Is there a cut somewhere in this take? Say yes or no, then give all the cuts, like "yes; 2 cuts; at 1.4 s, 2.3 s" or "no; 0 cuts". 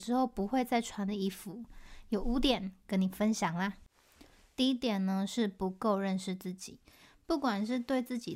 no; 0 cuts